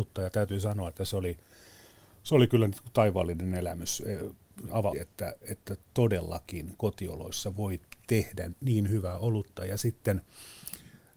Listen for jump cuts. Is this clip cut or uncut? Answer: cut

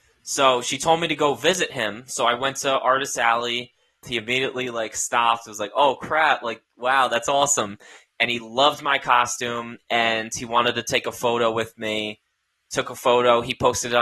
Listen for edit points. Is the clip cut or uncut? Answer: cut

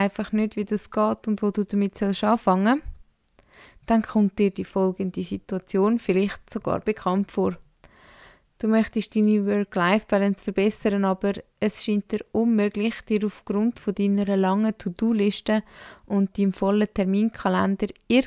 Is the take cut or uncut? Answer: uncut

